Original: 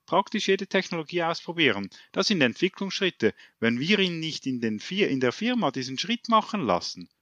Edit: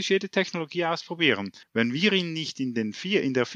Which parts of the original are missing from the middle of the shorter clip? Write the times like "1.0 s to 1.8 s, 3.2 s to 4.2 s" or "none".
2.0 s to 3.5 s

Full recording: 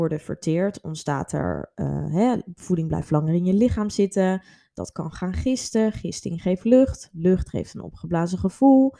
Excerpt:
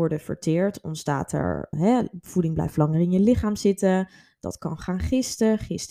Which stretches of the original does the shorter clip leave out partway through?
1.7 s to 2.1 s

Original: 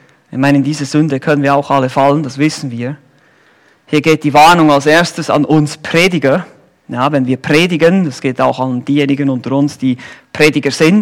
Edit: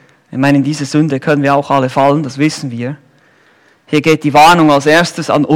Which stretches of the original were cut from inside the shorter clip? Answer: none

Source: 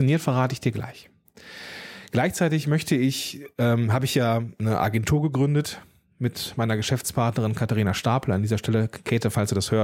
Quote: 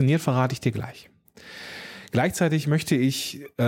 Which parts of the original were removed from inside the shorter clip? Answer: none

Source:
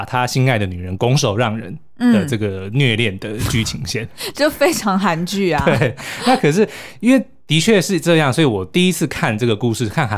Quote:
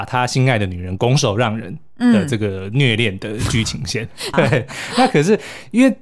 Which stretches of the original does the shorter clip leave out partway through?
4.3 s to 5.6 s

